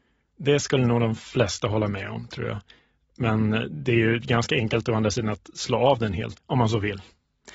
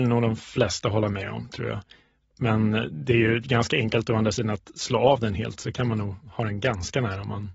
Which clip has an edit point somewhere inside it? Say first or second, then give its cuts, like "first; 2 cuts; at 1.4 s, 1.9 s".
first; 1 cut; at 6.3 s